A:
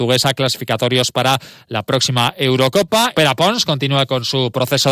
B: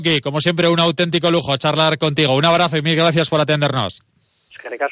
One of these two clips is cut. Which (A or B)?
A